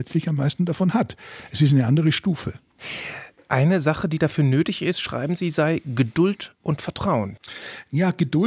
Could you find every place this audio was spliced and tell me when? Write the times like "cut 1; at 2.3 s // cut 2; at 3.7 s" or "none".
none